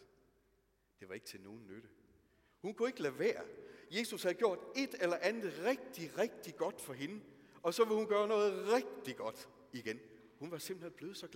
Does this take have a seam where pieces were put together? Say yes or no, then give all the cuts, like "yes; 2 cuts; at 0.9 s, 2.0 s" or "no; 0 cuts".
yes; 1 cut; at 2.5 s